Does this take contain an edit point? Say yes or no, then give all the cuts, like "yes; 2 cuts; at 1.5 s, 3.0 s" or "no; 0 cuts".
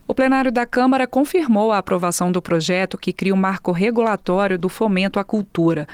no; 0 cuts